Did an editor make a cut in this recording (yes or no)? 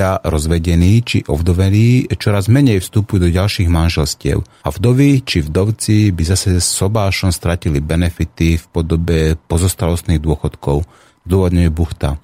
yes